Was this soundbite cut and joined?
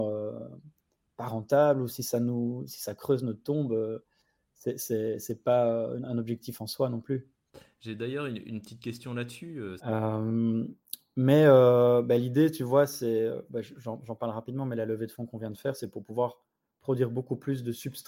yes; 1 cut; at 9.8 s

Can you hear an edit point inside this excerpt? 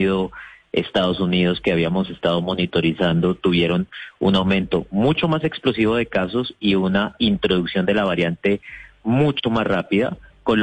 no; 0 cuts

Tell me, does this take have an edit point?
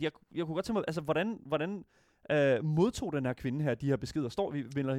no; 0 cuts

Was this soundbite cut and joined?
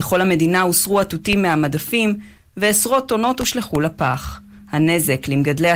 no; 0 cuts

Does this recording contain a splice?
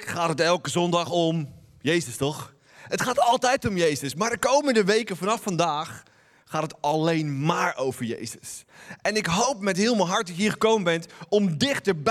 no; 0 cuts

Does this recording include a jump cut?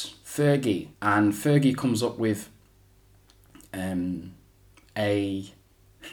yes; 1 cut; at 0.9 s

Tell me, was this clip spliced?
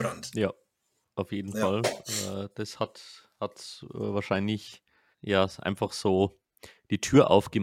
yes; 1 cut; at 5.1 s

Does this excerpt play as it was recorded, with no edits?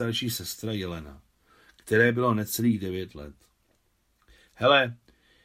yes; 0 cuts

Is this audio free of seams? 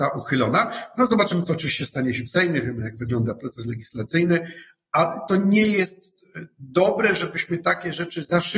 yes; 0 cuts

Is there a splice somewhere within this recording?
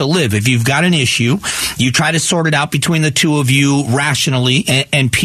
no; 0 cuts

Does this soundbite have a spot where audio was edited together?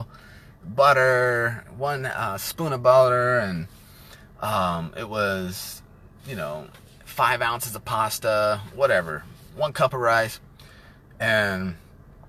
no; 0 cuts

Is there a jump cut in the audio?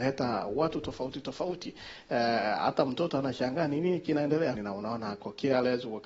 yes; 1 cut; at 4.5 s

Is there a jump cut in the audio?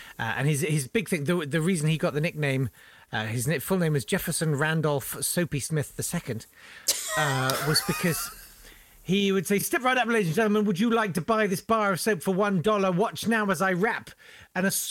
no; 0 cuts

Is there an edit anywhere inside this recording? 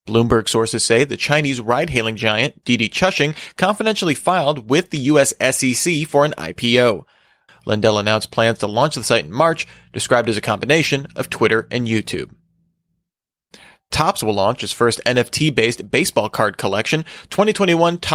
yes; 1 cut; at 7.5 s

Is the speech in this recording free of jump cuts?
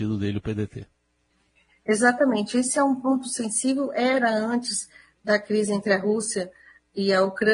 yes; 0 cuts

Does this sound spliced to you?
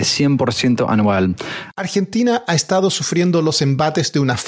yes; 1 cut; at 1.7 s

